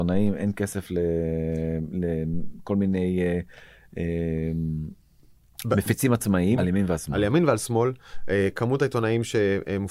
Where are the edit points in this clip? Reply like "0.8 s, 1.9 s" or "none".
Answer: 6.6 s

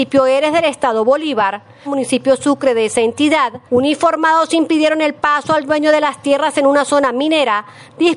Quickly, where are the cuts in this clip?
1.8 s, 3.7 s

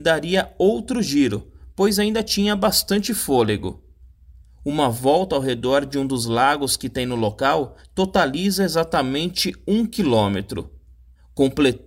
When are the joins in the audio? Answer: 4.4 s

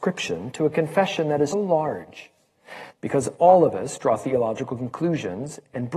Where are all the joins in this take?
1.5 s, 2.9 s

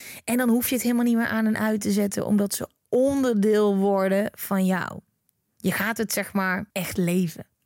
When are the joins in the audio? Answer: 6.7 s

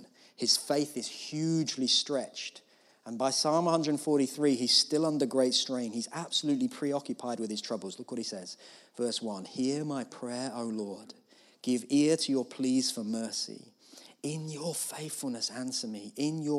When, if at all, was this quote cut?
none

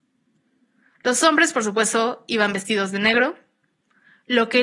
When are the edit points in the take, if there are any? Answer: none

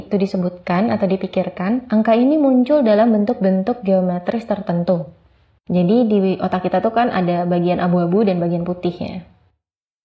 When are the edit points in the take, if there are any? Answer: 5.6 s

